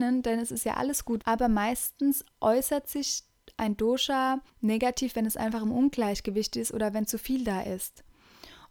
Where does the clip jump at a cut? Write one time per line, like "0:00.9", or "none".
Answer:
0:01.2
0:04.5